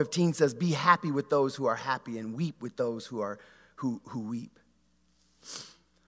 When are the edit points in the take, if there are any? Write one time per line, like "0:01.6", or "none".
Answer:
none